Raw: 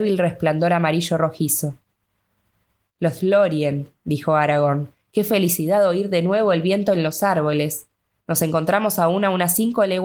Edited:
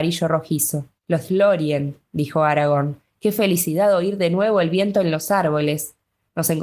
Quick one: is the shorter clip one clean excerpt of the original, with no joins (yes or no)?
no